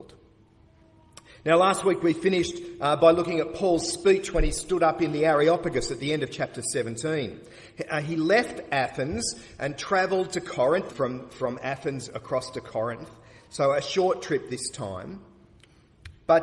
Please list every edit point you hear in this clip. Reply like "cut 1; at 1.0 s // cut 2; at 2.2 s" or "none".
cut 1; at 10.9 s